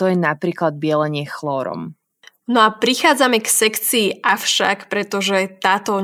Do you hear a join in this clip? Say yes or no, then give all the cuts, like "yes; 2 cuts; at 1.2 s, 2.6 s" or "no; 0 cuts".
no; 0 cuts